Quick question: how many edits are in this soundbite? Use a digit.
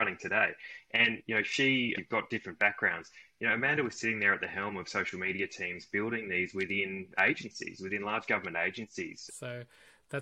2